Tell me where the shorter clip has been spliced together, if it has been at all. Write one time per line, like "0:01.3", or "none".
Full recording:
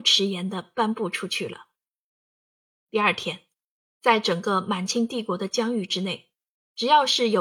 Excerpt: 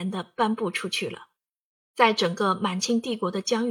0:01.8